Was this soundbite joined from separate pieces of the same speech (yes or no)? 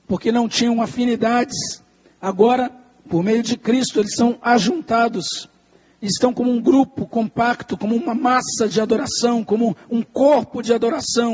no